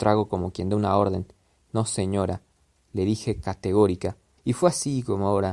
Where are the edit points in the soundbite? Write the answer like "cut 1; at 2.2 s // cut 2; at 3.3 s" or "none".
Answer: cut 1; at 4.4 s

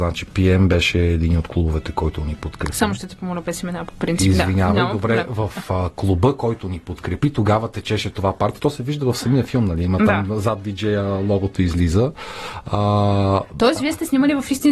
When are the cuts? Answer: none

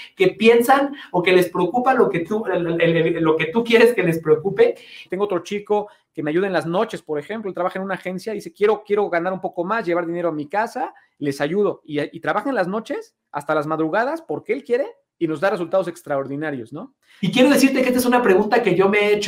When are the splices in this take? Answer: cut 1; at 5.1 s // cut 2; at 17.2 s

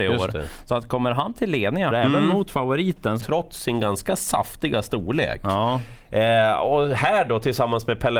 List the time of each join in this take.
cut 1; at 1.9 s // cut 2; at 3.2 s

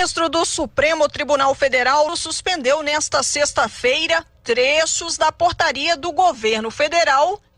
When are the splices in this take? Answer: cut 1; at 2.1 s

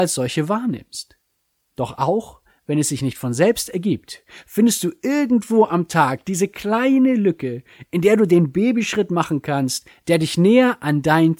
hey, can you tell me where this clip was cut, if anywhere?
none

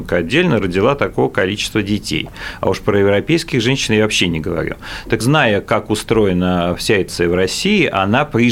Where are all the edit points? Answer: cut 1; at 5.2 s // cut 2; at 7.1 s

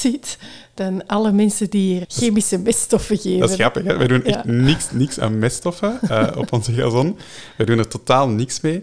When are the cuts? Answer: cut 1; at 2.0 s

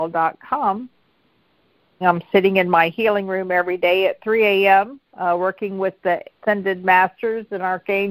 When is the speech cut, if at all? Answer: cut 1; at 2.0 s // cut 2; at 5.1 s // cut 3; at 6.3 s

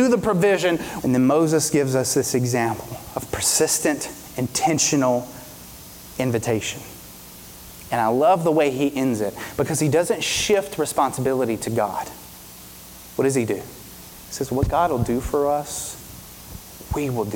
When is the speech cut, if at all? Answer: cut 1; at 1.0 s

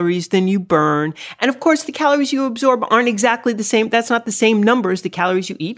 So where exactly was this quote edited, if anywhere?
none

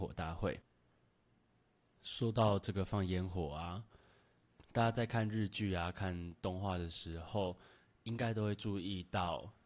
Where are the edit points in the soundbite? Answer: none

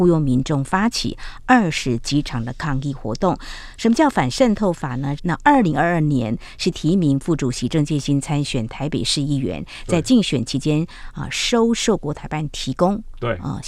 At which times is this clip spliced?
cut 1; at 5.2 s

